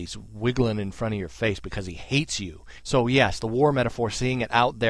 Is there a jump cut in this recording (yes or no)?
yes